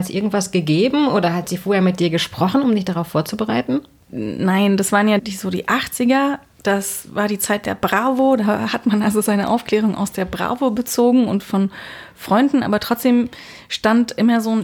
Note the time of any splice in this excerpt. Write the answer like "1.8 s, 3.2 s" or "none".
5.2 s